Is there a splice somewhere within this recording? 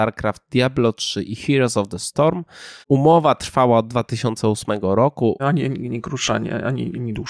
yes; 2 cuts; at 2.8 s, 5.4 s

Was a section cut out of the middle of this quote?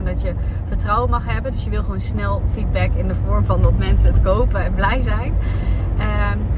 no; 0 cuts

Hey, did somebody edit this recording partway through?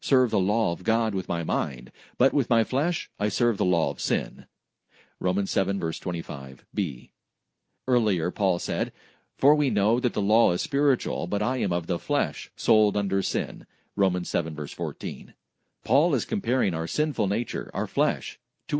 no; 0 cuts

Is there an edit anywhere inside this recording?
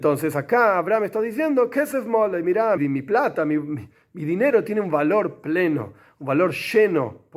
yes; 1 cut; at 2.8 s

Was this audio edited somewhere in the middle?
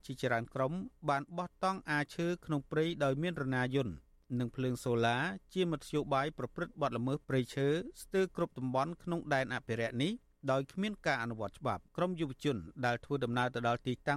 yes; 1 cut; at 11.9 s

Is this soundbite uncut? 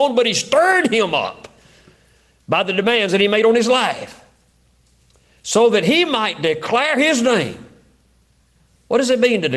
yes; 0 cuts

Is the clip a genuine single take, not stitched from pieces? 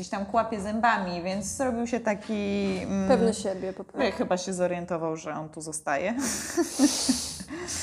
no; 1 cut; at 4.0 s

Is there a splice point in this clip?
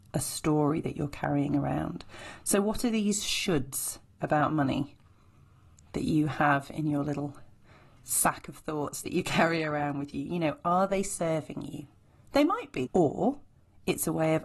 yes; 1 cut; at 12.9 s

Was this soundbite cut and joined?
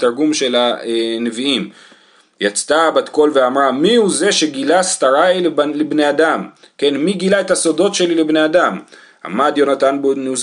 no; 0 cuts

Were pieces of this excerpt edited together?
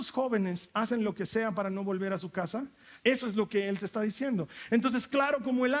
yes; 1 cut; at 3.0 s

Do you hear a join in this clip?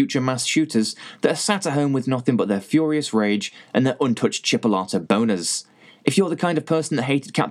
no; 0 cuts

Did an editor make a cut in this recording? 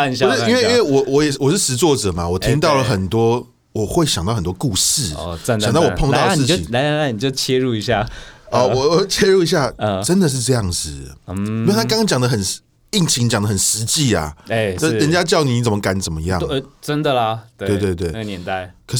no; 0 cuts

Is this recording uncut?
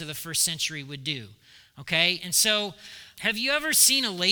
no; 1 cut; at 3.1 s

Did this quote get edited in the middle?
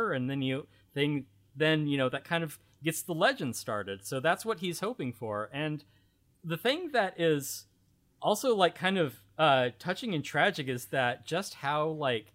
no; 0 cuts

